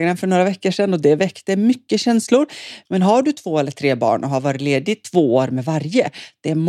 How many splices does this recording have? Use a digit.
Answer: 1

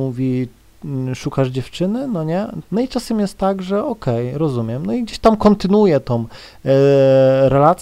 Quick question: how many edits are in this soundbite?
1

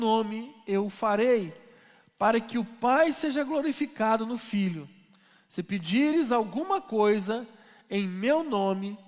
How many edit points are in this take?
0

